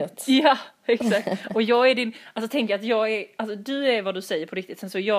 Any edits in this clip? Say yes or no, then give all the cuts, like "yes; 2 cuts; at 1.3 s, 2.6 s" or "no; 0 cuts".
no; 0 cuts